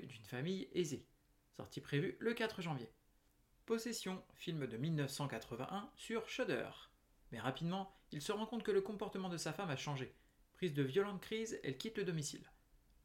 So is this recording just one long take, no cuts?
no; 1 cut; at 7.2 s

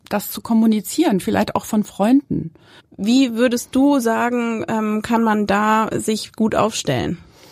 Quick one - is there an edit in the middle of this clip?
yes; 1 cut; at 2.8 s

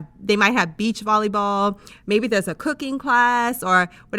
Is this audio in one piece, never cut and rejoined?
yes; 0 cuts

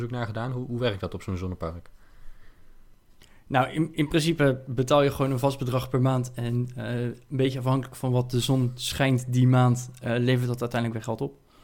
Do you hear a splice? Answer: no; 0 cuts

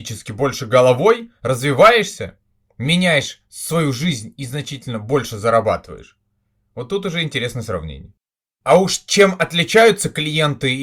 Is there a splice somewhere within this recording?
no; 0 cuts

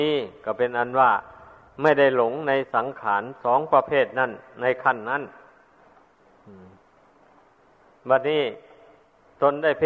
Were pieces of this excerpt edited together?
no; 0 cuts

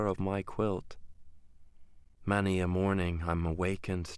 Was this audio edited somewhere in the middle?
no; 0 cuts

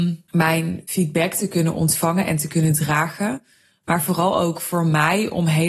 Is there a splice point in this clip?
no; 0 cuts

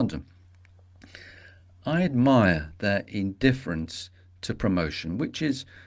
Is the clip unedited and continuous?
yes; 0 cuts

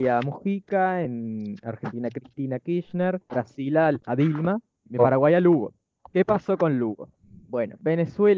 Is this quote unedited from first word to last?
yes; 0 cuts

